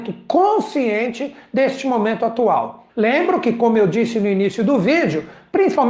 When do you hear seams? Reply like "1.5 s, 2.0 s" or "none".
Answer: 2.9 s